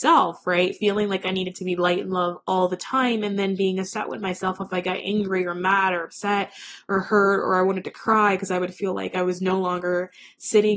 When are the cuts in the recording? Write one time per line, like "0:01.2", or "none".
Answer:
none

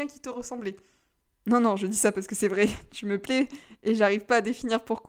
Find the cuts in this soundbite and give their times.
0:01.3

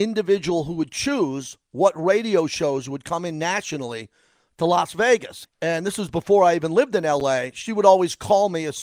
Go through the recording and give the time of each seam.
0:05.4

